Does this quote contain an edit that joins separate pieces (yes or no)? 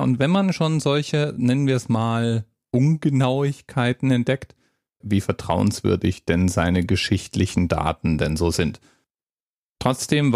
yes